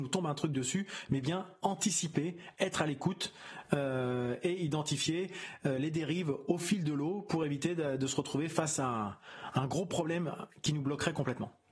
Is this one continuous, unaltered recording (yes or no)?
yes